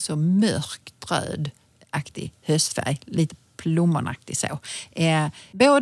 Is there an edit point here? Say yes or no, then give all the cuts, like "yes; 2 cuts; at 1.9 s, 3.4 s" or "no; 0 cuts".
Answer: no; 0 cuts